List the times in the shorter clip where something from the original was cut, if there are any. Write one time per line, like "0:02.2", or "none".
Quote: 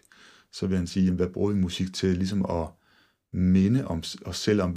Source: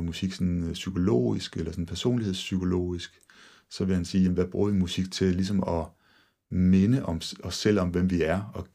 none